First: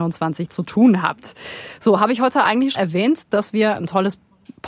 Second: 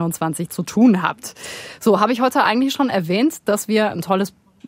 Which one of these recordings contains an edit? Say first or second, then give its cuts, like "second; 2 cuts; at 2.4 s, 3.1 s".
first; 1 cut; at 2.7 s